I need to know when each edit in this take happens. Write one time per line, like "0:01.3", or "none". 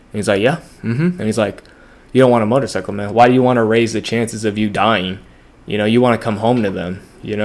none